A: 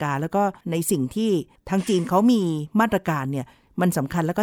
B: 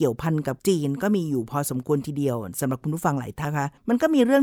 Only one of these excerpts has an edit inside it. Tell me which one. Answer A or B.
B